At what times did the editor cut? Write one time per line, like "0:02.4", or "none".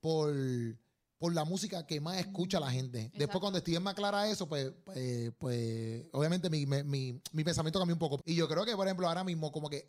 0:08.2